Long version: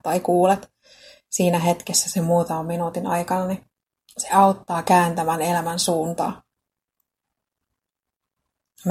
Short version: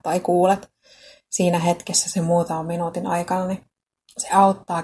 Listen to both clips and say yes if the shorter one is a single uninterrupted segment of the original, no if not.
yes